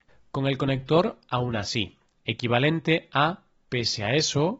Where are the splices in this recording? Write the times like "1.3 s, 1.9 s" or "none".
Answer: none